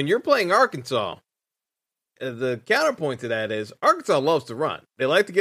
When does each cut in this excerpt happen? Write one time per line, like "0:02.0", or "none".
0:02.2